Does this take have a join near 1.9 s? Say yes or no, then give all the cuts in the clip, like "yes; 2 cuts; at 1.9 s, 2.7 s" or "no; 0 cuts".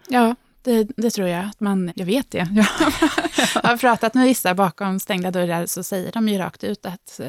yes; 1 cut; at 1.9 s